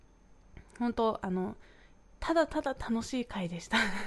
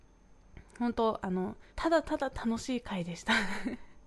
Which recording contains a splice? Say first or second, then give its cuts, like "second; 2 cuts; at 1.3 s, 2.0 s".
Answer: second; 1 cut; at 1.7 s